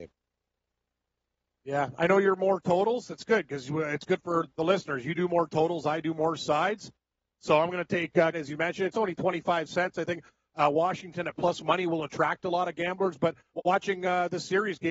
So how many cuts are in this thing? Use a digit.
1